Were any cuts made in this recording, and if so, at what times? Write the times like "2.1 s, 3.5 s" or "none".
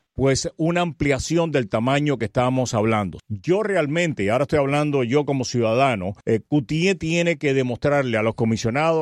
3.2 s, 6.2 s

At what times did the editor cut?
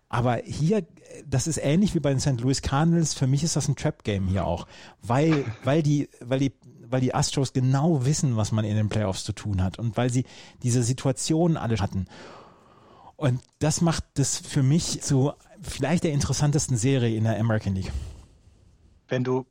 11.8 s, 15.0 s

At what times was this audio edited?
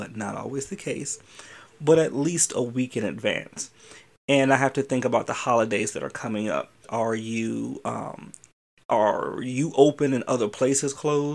6.8 s

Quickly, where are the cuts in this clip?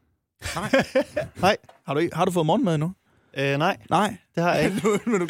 none

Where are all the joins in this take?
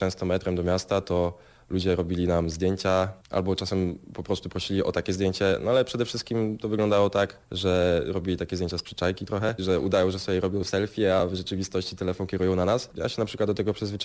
9.6 s, 12.9 s

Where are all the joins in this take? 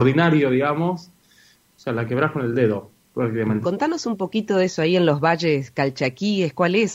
1.6 s, 3.6 s

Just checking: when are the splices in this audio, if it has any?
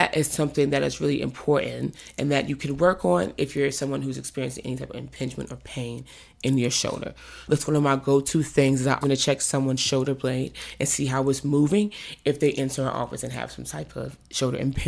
7.5 s, 9.0 s

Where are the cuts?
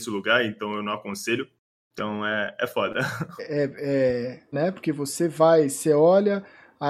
3.4 s, 4.5 s

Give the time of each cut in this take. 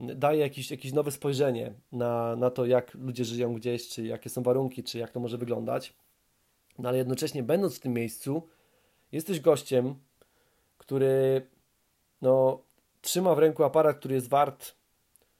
none

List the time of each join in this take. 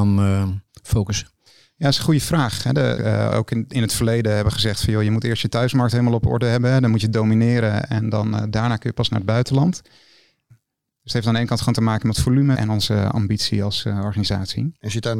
3.0 s, 10.5 s, 12.6 s

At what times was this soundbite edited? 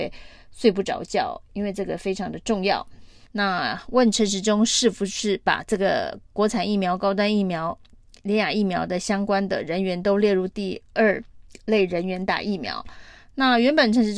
3.2 s

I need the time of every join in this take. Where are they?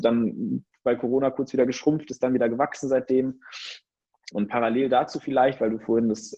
4.3 s

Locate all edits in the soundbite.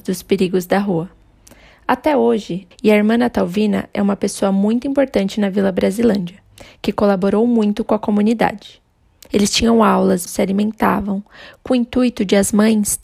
2.7 s, 9.3 s, 10.3 s

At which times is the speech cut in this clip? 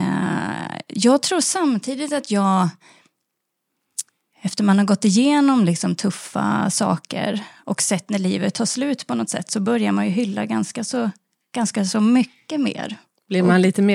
7.6 s

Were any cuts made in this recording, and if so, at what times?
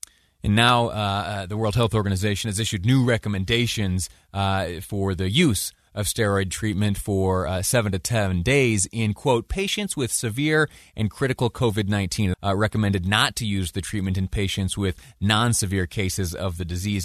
12.3 s

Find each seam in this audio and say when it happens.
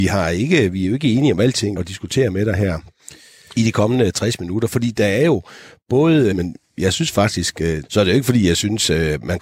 1.8 s, 6.3 s, 7.8 s

